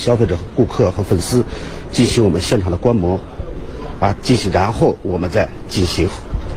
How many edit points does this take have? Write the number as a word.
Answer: one